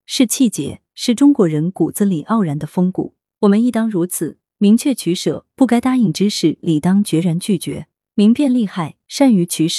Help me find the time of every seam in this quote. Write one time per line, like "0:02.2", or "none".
none